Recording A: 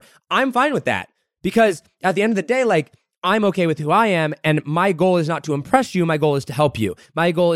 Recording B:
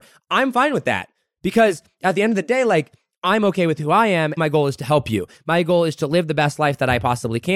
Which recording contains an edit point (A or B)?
B